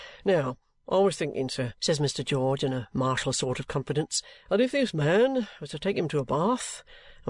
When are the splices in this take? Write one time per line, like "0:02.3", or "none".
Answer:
0:01.8
0:04.5

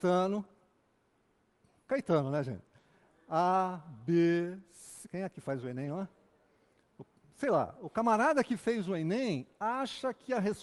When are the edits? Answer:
0:01.9
0:05.0

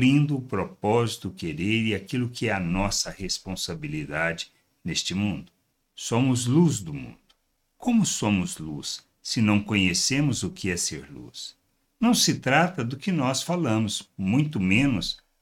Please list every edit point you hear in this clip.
none

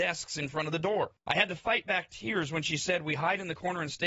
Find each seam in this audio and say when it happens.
0:01.2

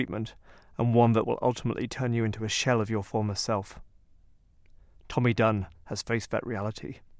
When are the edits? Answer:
none

